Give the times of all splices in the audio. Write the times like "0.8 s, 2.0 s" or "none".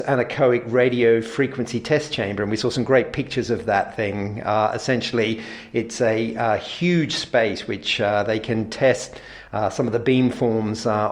none

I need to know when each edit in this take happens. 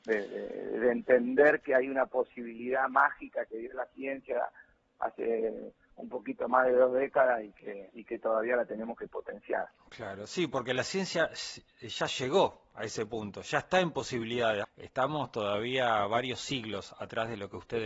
14.6 s

